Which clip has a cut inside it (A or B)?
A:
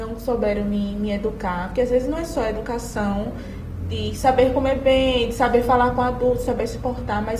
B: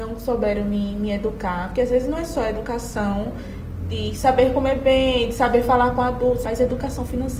B